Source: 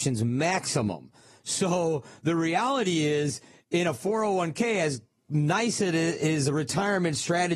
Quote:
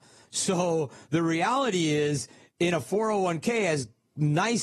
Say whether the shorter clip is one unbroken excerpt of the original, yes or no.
yes